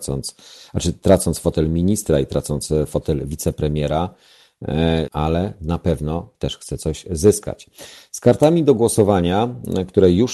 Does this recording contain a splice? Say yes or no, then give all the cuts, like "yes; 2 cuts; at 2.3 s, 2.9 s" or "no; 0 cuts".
yes; 1 cut; at 5.1 s